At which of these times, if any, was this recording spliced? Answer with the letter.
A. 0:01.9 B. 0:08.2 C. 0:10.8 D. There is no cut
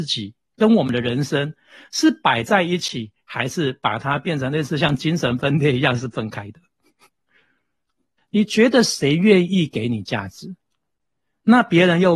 B